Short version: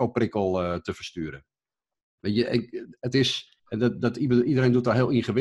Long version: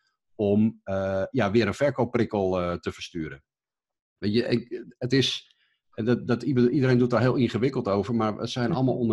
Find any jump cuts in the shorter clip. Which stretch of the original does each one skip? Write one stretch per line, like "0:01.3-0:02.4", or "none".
0:05.6-0:05.8